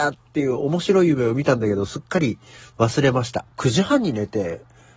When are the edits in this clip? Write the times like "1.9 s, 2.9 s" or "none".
3.5 s

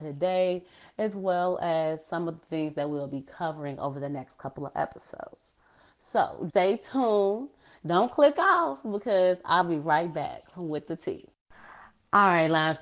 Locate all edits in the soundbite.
6.5 s

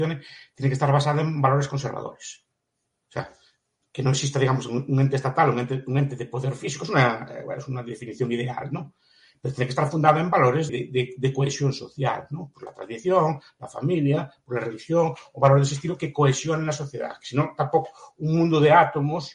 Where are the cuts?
10.7 s

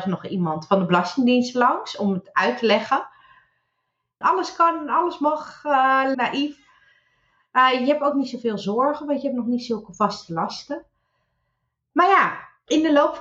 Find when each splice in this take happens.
4.2 s, 6.1 s

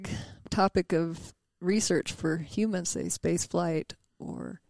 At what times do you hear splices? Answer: 2.8 s

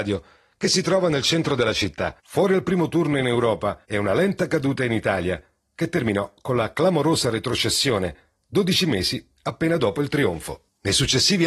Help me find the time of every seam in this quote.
2.2 s, 3.8 s

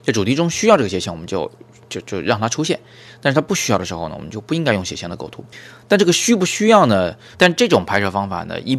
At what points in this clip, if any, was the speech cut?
7.3 s

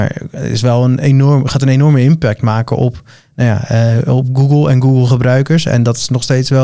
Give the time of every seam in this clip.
none

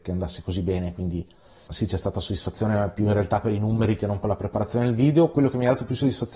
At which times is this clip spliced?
1.7 s

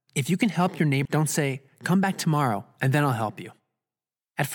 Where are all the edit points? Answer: 1.1 s

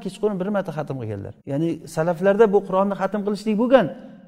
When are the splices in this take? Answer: 1.4 s

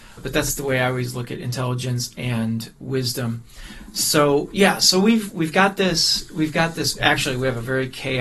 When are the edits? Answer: none

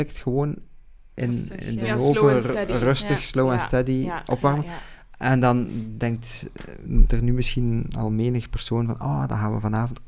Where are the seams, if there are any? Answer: none

